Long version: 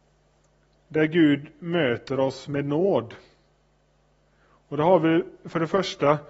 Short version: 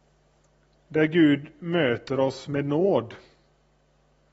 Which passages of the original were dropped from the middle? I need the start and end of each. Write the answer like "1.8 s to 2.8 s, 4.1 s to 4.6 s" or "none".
none